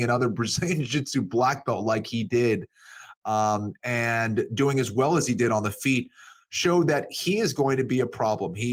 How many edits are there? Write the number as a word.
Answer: zero